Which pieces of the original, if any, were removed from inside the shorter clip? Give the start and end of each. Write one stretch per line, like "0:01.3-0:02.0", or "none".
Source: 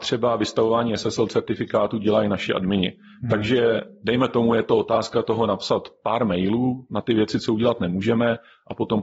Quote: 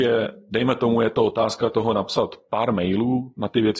none